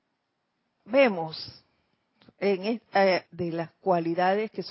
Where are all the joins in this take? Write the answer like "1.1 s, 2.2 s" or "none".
3.3 s